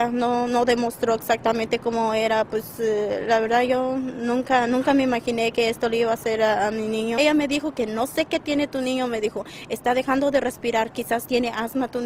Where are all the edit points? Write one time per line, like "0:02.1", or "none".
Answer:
none